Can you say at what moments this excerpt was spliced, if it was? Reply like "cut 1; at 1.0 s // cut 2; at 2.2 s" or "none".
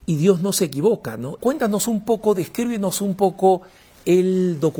cut 1; at 1.4 s